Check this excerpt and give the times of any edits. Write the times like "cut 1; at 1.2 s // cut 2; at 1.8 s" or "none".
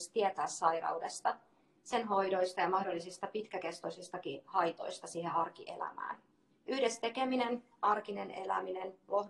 cut 1; at 6.5 s